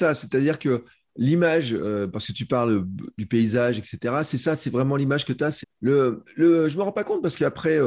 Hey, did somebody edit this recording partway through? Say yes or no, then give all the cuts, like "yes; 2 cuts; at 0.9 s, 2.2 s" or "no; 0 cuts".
yes; 1 cut; at 5.6 s